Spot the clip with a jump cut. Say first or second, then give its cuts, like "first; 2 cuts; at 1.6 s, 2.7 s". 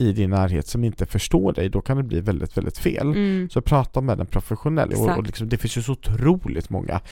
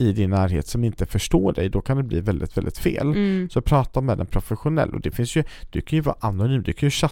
first; 1 cut; at 4.9 s